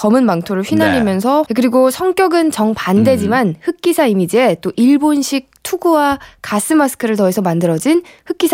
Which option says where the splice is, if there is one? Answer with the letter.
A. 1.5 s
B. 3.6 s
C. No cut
A